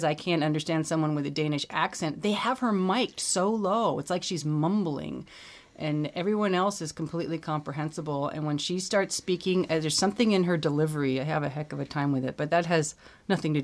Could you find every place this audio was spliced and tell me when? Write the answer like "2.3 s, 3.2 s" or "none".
none